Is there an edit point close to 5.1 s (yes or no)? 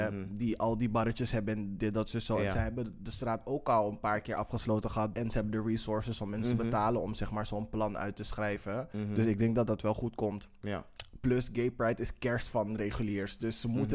yes